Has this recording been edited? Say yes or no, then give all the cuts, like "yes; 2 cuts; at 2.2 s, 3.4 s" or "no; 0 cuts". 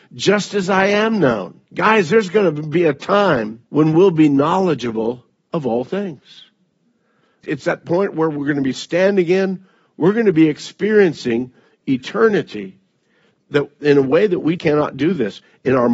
yes; 3 cuts; at 1.7 s, 3.7 s, 14.6 s